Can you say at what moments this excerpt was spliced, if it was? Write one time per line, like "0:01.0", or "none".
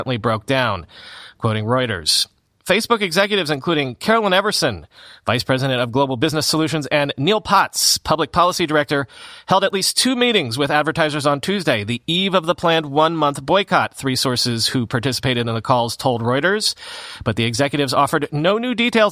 none